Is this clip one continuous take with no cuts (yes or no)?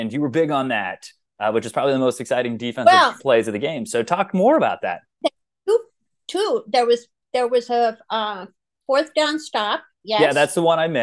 yes